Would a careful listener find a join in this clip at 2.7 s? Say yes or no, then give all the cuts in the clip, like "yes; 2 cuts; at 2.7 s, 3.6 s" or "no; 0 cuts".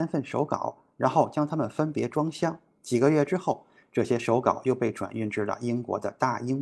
no; 0 cuts